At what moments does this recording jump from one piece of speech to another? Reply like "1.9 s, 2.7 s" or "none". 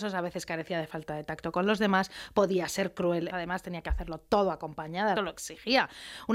3.3 s, 5.2 s